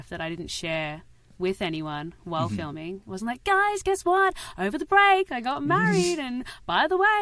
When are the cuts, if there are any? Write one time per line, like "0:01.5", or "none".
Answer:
none